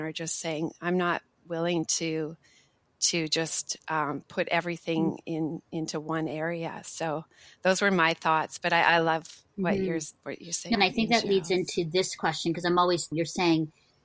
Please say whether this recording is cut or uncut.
cut